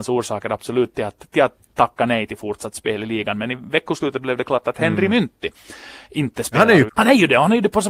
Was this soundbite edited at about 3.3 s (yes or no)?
no